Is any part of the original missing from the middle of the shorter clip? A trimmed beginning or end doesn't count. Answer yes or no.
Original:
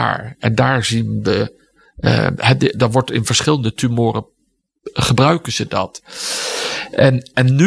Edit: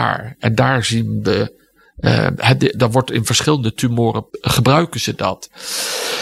yes